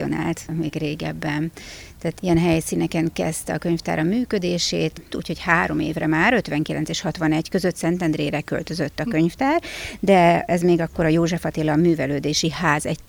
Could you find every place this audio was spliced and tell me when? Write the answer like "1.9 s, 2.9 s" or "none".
5.1 s